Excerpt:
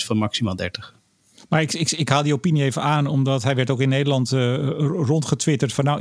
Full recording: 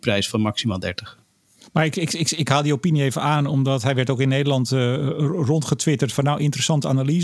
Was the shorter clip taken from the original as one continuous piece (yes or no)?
no